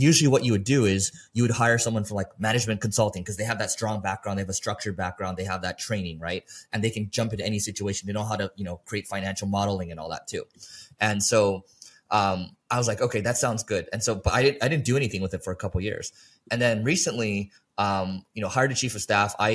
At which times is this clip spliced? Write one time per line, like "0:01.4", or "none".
none